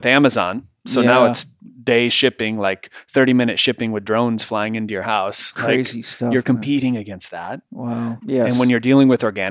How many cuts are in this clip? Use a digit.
1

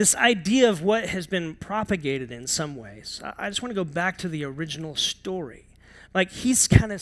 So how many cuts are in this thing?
1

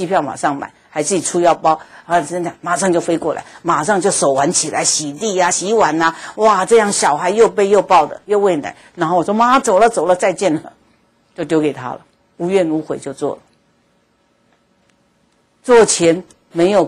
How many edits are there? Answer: 0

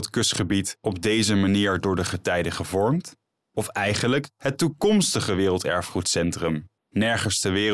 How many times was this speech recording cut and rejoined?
2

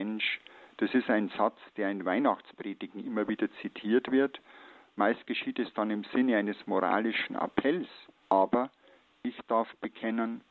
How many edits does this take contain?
1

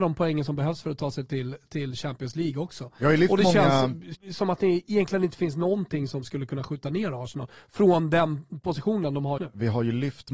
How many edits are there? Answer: 2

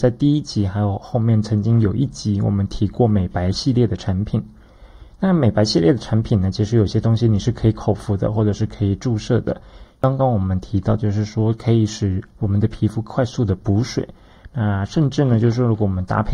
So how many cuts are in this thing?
1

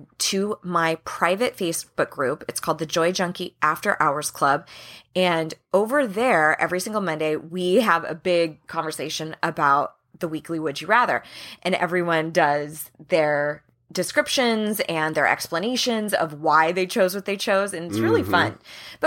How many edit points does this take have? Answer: 0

